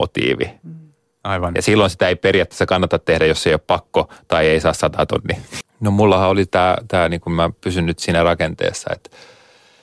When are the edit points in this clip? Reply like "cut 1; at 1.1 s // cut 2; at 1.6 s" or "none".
cut 1; at 5.6 s